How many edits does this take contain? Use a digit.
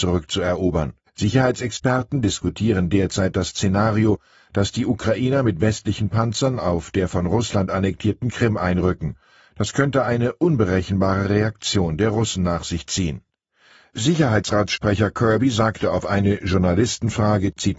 1